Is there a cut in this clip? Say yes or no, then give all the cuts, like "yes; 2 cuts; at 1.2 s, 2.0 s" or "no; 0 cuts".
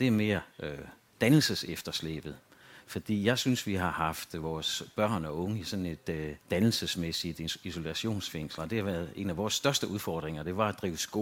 yes; 2 cuts; at 6.4 s, 8.6 s